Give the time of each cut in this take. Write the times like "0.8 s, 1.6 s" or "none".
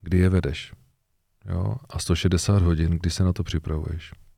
none